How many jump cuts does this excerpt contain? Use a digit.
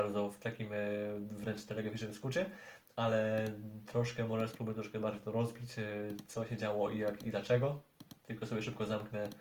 1